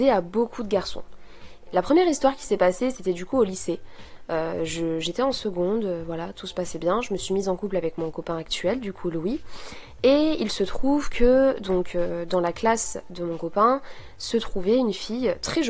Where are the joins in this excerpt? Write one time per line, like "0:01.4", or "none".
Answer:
0:01.7